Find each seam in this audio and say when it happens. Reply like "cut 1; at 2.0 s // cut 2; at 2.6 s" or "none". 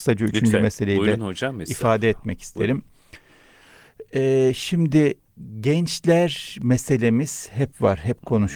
none